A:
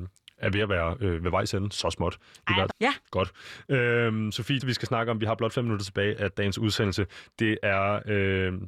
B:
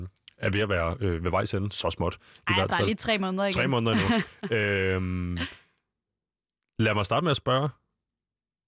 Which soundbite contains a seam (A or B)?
A